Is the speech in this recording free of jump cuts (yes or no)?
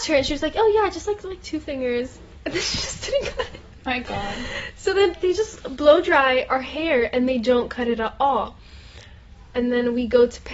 yes